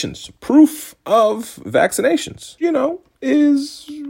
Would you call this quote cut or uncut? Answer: cut